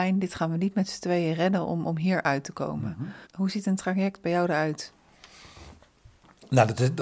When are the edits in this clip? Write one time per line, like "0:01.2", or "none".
0:03.2